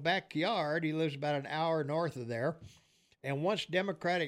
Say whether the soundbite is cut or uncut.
uncut